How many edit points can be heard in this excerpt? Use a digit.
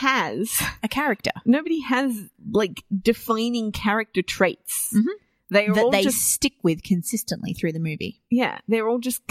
0